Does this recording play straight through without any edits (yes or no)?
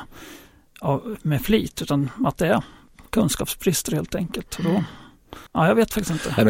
no